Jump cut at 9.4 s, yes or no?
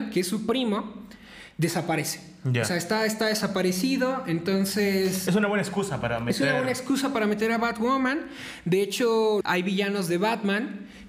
yes